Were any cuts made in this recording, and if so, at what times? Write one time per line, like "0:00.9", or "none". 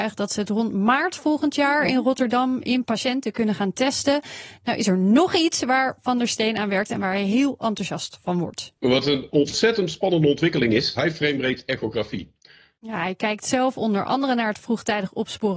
0:11.0
0:12.7